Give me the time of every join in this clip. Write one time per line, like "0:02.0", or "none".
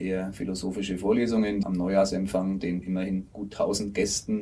0:01.6